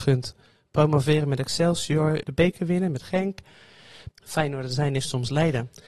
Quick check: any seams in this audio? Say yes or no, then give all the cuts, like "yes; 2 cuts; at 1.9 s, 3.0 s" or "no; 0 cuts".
yes; 2 cuts; at 2.2 s, 4.1 s